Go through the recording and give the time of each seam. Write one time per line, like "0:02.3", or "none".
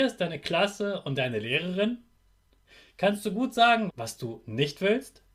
0:03.9